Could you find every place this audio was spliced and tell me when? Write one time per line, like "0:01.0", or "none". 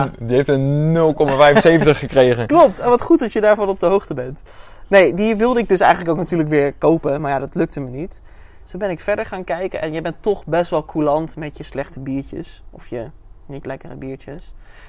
none